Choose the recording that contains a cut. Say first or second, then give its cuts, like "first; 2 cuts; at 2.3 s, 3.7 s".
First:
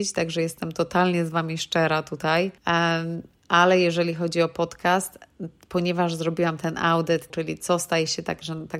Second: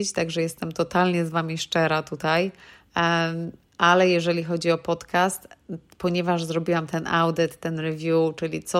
first; 2 cuts; at 2.6 s, 7.3 s